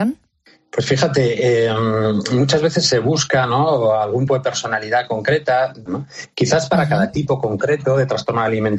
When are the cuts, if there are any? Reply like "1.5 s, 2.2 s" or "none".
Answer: 4.3 s, 5.9 s